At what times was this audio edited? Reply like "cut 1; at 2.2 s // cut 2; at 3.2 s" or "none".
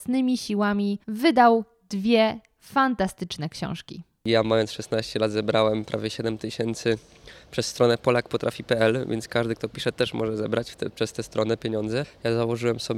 cut 1; at 1.0 s